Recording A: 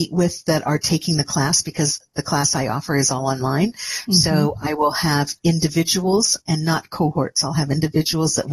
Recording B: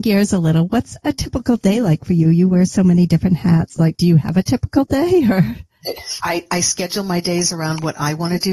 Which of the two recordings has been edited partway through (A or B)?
B